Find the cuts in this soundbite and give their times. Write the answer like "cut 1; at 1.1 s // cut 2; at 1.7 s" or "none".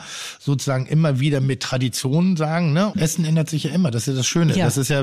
cut 1; at 2.9 s